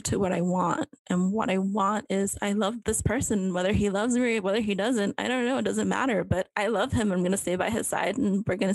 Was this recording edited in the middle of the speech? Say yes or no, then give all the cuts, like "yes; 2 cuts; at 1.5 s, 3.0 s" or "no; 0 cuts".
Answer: yes; 2 cuts; at 1.0 s, 2.8 s